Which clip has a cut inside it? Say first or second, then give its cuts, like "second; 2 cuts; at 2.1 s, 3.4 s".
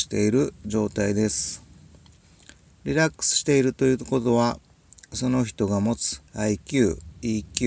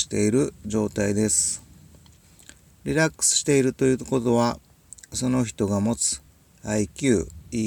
first; 1 cut; at 6.3 s